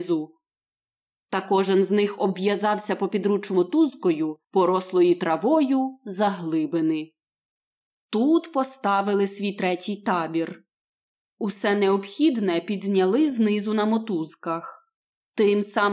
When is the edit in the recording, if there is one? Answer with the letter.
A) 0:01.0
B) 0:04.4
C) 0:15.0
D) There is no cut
B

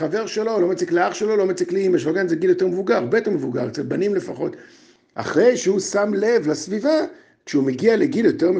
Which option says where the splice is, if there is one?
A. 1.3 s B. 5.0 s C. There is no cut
B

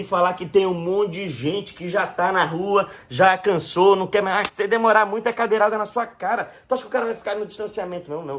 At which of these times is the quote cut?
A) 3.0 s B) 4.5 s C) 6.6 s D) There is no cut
B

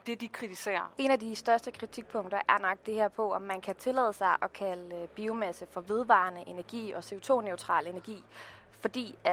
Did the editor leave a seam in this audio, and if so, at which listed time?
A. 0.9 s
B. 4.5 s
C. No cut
A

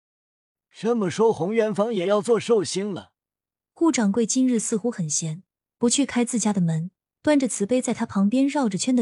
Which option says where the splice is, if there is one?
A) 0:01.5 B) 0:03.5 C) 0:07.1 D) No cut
B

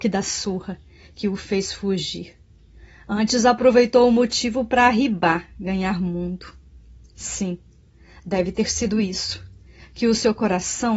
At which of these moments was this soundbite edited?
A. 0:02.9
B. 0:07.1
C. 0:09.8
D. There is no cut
D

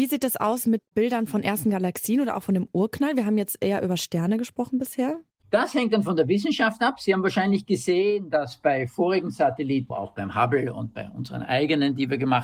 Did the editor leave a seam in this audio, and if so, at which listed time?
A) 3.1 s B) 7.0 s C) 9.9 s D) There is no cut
C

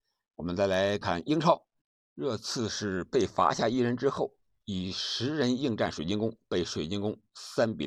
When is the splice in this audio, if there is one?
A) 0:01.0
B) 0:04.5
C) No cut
A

